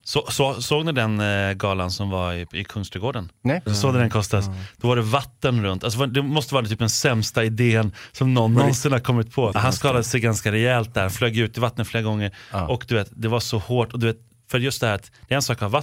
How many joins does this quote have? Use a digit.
2